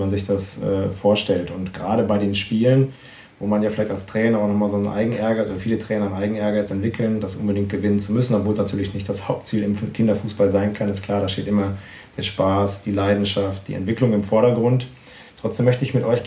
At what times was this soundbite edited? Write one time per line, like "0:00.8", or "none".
none